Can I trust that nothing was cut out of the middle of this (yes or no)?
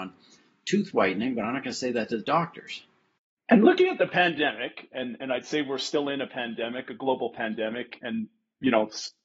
no